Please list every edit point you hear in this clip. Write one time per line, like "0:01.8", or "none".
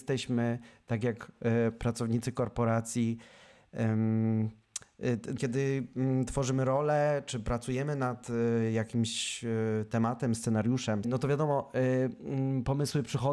0:05.4
0:11.0

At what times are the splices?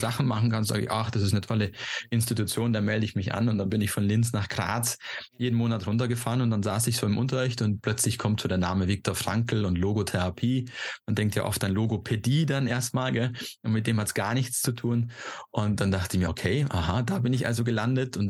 none

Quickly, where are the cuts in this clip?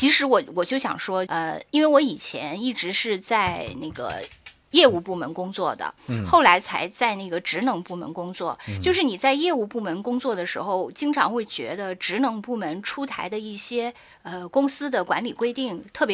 0:01.3

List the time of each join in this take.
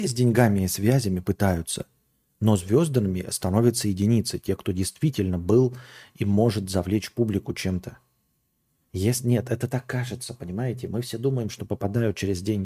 0:08.9

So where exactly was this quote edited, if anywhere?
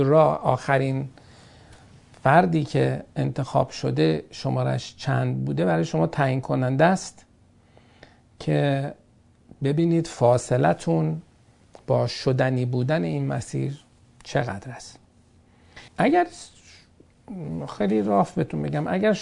0:15.9

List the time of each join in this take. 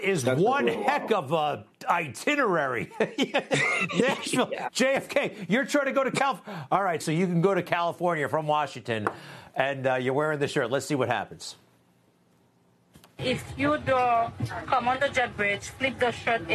0:07.0

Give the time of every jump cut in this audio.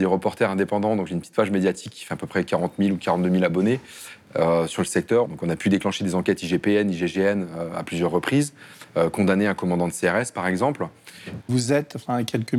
0:05.2
0:11.4

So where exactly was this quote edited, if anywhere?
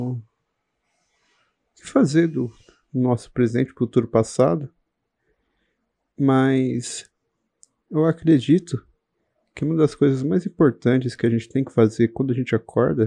none

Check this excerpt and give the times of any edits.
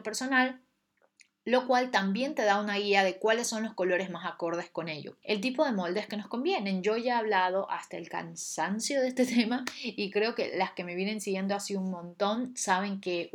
0:05.2

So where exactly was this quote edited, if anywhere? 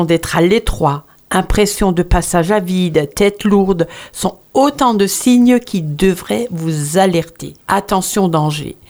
none

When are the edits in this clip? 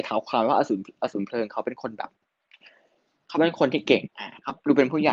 0:04.1

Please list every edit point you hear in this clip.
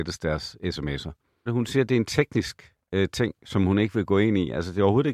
0:01.5

